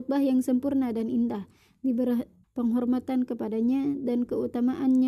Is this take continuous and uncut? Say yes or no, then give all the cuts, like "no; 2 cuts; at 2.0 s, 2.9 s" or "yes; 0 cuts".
no; 1 cut; at 2.4 s